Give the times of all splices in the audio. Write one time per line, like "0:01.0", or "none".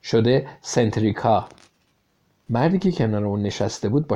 none

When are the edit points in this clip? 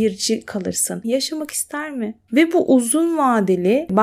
0:01.0
0:02.3

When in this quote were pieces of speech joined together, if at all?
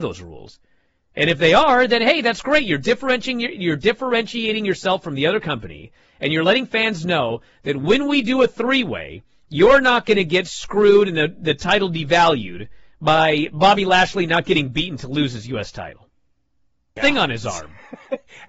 0:17.0

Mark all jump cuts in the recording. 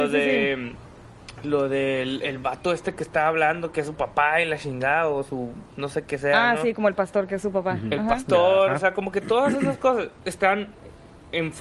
none

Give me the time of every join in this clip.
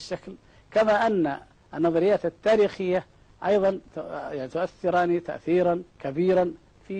0:05.9

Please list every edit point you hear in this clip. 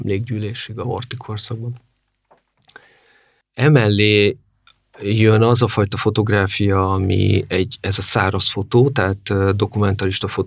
0:03.4

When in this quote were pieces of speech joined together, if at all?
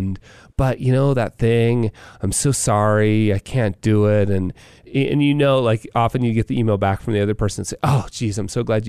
none

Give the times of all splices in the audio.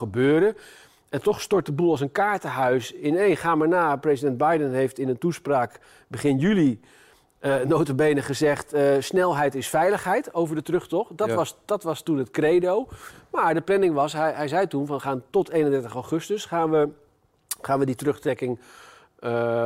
none

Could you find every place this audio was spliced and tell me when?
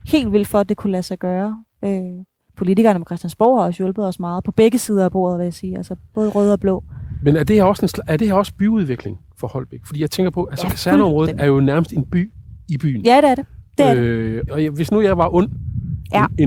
0:14.5

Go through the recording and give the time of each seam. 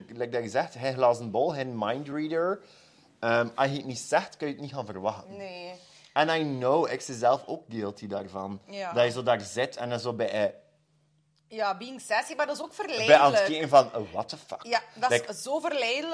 none

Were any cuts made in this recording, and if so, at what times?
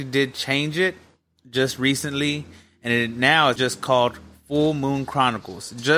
0:03.6

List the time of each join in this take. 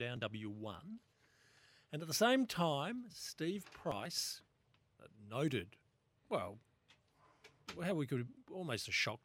none

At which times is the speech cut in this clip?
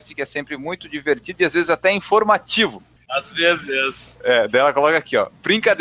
none

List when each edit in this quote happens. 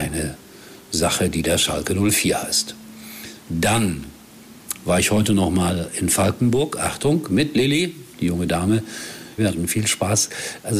0:08.1
0:09.4

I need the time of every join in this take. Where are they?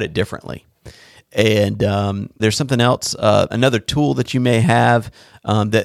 0:02.4
0:03.5

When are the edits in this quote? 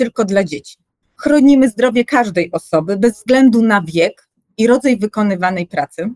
0:01.0

